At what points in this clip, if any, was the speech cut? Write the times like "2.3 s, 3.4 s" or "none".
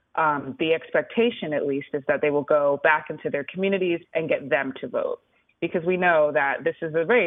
4.0 s